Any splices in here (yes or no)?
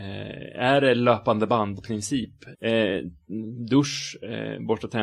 yes